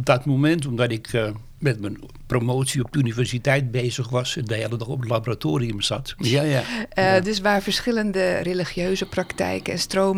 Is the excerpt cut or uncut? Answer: cut